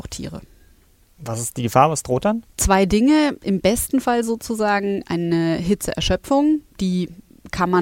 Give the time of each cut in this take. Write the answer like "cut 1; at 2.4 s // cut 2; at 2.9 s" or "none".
cut 1; at 2.5 s